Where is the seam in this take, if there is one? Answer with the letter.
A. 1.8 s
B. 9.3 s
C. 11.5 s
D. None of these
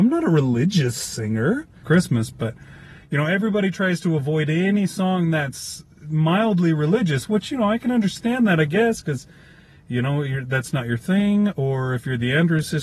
A